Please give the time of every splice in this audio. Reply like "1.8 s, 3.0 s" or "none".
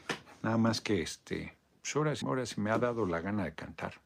2.2 s